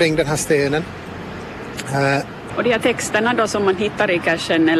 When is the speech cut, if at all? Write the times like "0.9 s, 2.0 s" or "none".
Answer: 2.5 s